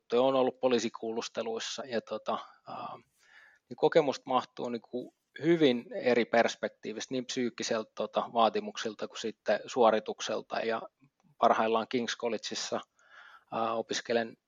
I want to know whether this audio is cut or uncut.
cut